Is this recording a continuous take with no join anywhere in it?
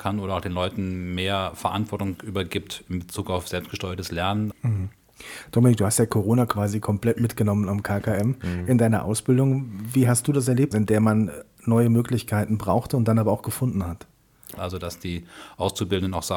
no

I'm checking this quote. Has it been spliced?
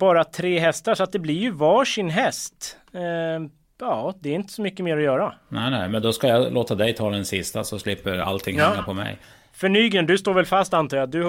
no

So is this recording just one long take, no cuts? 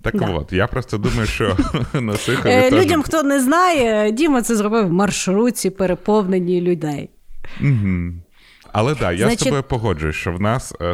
no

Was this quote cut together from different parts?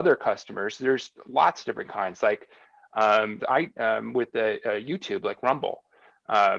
yes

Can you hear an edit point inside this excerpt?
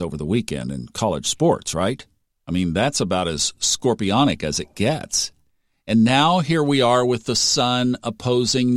no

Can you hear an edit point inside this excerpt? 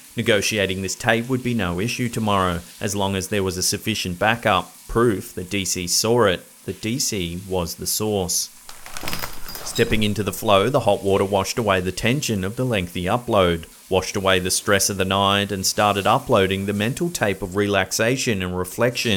no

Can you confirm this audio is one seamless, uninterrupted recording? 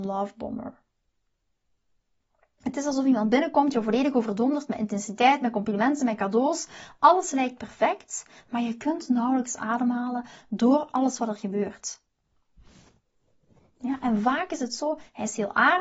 yes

